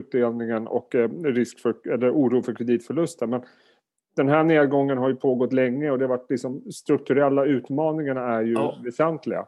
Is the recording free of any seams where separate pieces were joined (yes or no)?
yes